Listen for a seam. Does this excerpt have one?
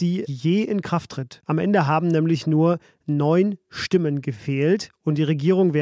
yes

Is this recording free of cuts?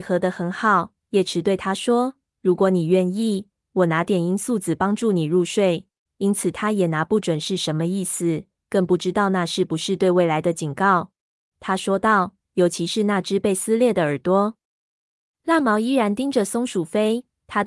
no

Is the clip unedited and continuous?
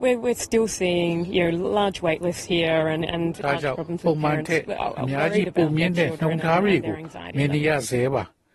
yes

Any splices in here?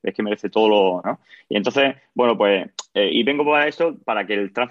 yes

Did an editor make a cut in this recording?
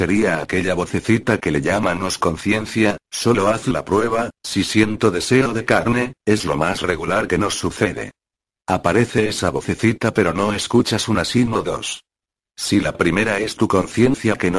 no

